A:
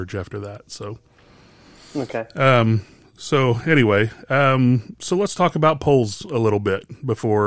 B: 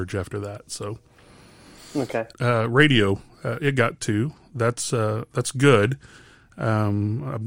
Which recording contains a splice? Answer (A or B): B